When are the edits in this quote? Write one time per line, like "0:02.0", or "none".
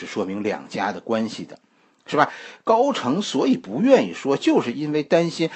none